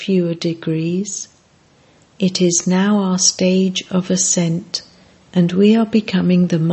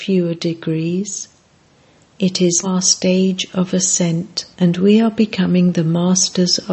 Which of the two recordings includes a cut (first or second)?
second